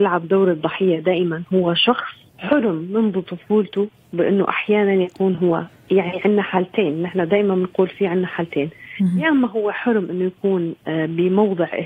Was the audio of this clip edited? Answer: yes; 1 cut; at 2.3 s

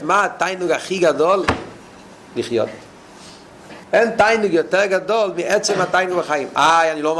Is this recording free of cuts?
no; 1 cut; at 3.8 s

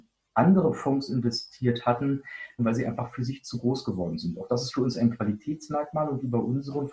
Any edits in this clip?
yes; 1 cut; at 2.6 s

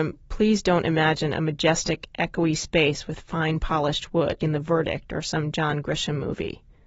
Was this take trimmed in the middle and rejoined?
yes; 1 cut; at 4.4 s

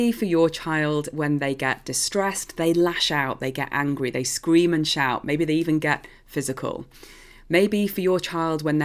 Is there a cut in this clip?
no; 0 cuts

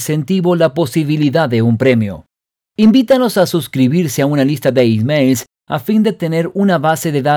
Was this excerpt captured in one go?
yes; 0 cuts

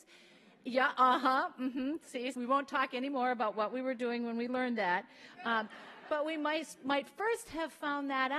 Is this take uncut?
no; 2 cuts; at 2.3 s, 6.1 s

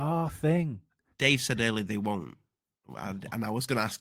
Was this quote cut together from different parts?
no; 0 cuts

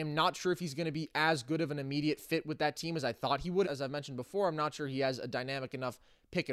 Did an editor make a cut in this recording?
yes; 1 cut; at 3.6 s

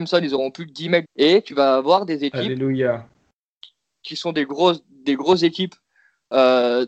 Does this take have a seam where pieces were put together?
yes; 1 cut; at 1.1 s

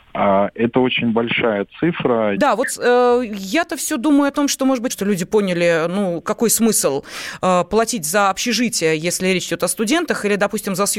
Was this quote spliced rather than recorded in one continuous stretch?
yes; 2 cuts; at 2.3 s, 4.9 s

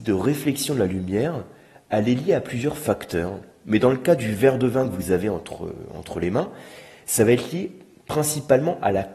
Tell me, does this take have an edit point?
no; 0 cuts

